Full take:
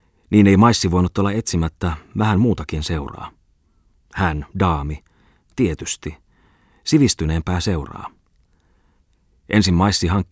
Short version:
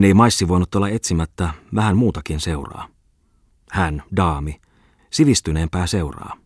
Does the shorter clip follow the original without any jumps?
no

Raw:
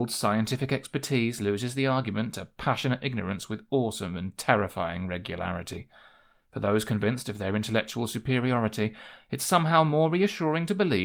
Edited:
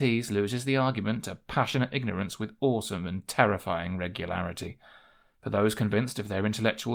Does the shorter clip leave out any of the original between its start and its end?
no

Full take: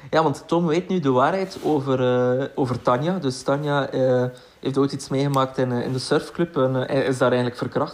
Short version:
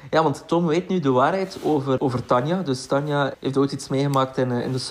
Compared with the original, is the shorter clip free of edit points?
no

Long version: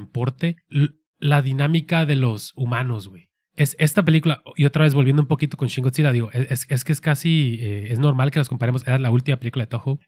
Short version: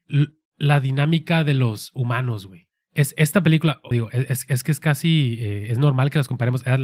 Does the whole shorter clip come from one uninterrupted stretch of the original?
no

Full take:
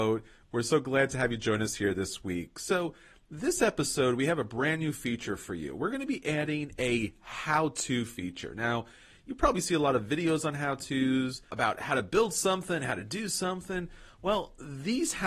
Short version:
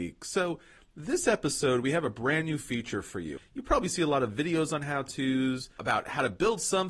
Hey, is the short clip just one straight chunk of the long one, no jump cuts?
no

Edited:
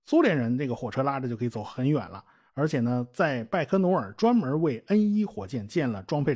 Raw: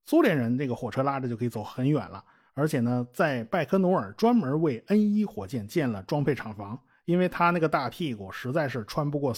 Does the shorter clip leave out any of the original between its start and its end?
no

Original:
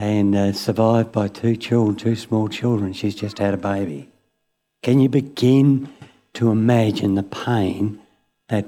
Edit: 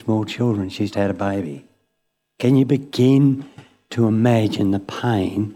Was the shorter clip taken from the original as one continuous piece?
no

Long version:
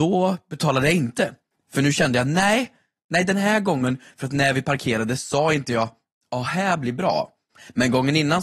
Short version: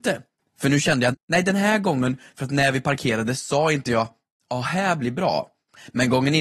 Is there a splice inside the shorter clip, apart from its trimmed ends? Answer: yes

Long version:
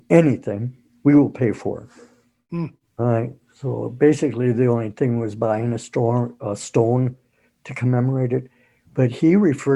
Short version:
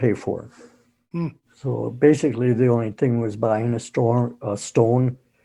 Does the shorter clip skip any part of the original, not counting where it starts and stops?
yes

